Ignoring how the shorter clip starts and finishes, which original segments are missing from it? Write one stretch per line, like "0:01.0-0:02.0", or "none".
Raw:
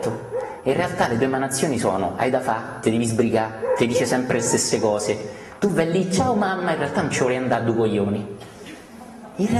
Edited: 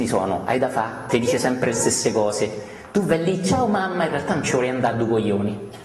0:02.8-0:03.8